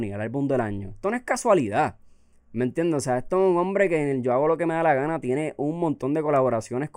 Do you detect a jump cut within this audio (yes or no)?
no